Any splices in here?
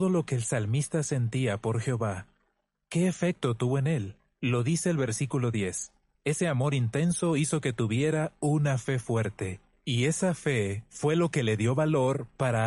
no; 0 cuts

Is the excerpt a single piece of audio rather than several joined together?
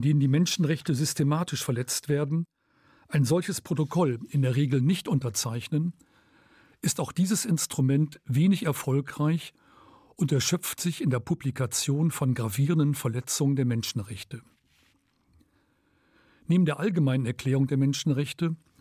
yes; 0 cuts

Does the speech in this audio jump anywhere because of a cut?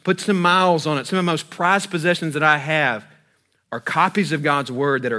no; 0 cuts

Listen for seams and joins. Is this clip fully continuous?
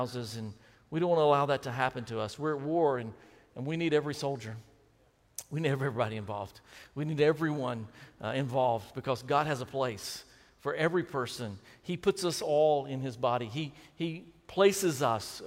yes; 0 cuts

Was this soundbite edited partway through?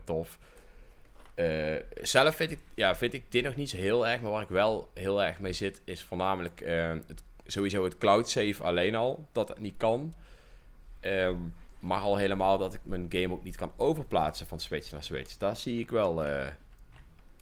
no; 0 cuts

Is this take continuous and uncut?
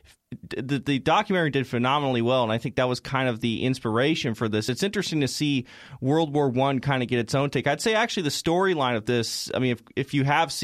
yes; 0 cuts

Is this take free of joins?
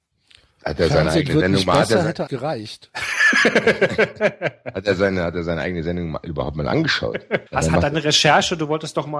no; 2 cuts; at 2.3 s, 7.5 s

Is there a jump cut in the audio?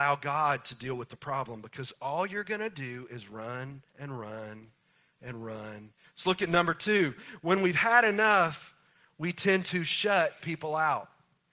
yes; 2 cuts; at 3.9 s, 6.0 s

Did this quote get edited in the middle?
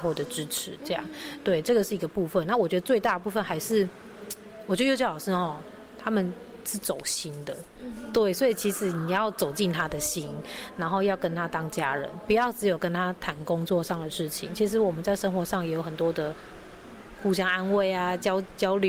no; 0 cuts

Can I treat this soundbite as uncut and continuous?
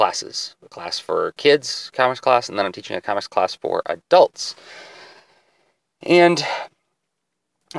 yes; 0 cuts

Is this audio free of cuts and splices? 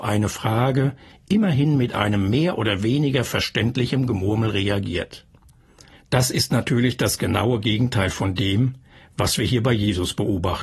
yes; 0 cuts

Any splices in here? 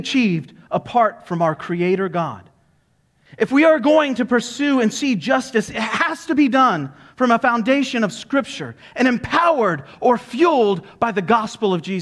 no; 0 cuts

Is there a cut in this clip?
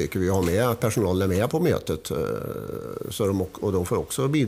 yes; 1 cut; at 1.5 s

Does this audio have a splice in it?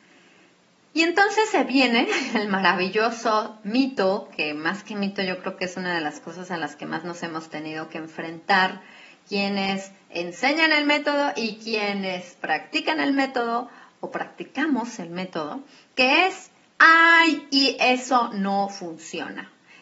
no; 0 cuts

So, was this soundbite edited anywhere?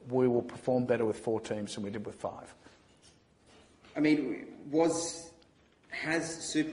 no; 0 cuts

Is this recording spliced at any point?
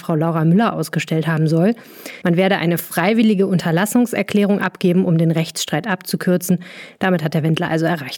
yes; 1 cut; at 2.2 s

